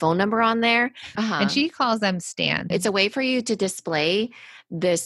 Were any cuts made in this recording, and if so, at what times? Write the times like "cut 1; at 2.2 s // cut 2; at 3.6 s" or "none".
cut 1; at 1.2 s // cut 2; at 2.7 s